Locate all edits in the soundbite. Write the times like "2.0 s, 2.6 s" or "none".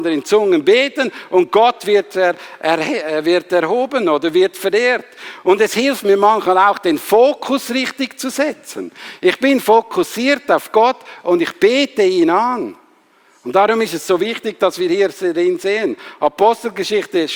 none